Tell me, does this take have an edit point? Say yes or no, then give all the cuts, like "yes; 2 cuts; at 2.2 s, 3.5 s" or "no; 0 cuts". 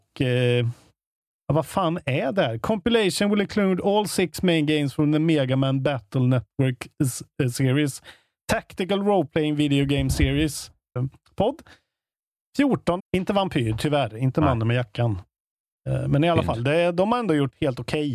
yes; 2 cuts; at 11.0 s, 13.0 s